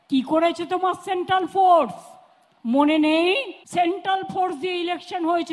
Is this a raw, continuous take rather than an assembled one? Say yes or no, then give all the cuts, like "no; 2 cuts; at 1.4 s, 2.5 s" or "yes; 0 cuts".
no; 1 cut; at 3.6 s